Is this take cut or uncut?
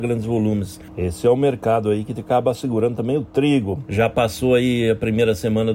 cut